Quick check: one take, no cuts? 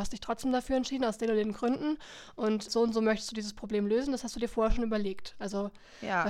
no; 1 cut; at 2.7 s

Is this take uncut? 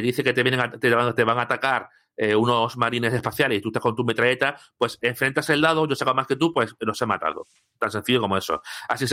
yes; 0 cuts

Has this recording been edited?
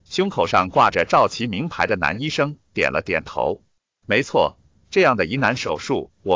no; 0 cuts

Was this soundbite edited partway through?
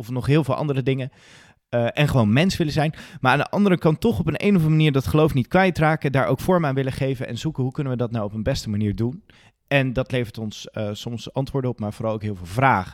no; 0 cuts

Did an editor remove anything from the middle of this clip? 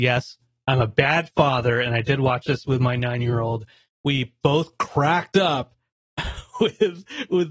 no; 0 cuts

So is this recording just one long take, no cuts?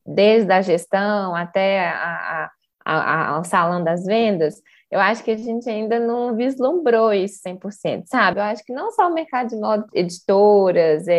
no; 2 cuts; at 8.3 s, 9.9 s

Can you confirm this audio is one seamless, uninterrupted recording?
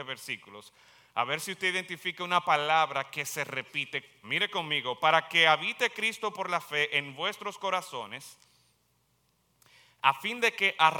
no; 1 cut; at 4.2 s

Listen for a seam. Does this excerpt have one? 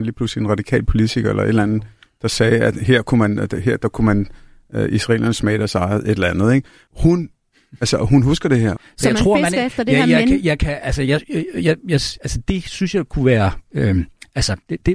yes; 2 cuts; at 6.9 s, 8.8 s

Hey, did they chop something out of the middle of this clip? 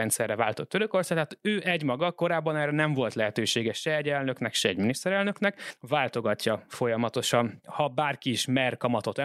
no; 0 cuts

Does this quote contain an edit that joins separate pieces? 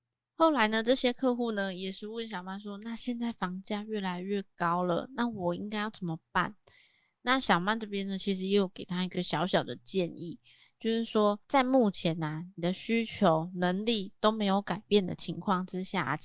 no; 0 cuts

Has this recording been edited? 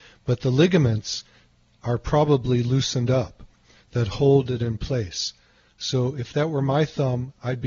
no; 0 cuts

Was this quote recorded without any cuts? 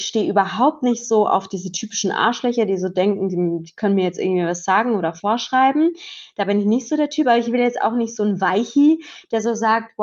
yes; 0 cuts

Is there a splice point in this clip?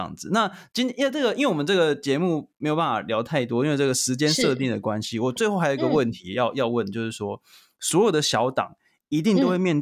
no; 0 cuts

